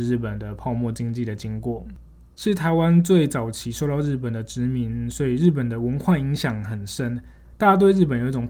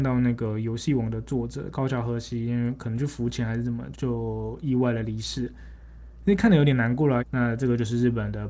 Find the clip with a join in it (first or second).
second